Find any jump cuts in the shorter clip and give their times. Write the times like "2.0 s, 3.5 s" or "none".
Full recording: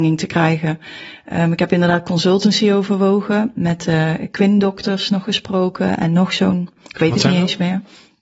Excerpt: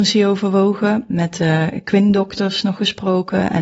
none